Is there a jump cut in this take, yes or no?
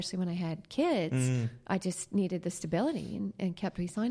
no